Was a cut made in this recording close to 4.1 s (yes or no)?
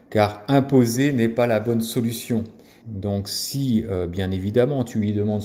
no